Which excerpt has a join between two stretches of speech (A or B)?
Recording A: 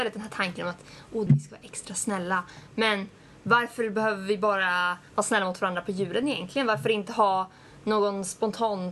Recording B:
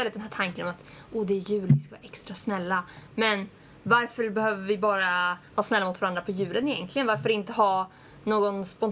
A